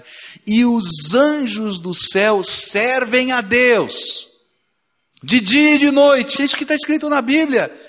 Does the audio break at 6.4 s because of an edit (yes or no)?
yes